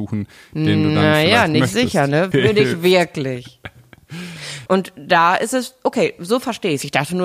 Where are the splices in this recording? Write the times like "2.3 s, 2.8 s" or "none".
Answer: 2.3 s, 4.7 s